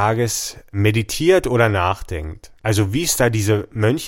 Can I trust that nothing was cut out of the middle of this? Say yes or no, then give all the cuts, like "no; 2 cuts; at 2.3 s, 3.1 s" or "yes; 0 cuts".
yes; 0 cuts